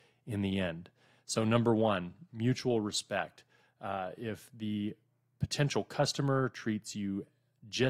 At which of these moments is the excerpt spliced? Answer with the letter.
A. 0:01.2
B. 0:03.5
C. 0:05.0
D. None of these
D